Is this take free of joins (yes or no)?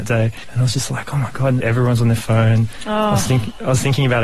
no